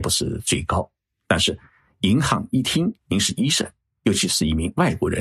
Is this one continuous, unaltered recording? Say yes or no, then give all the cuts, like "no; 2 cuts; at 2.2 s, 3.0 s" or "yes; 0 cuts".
no; 1 cut; at 3.0 s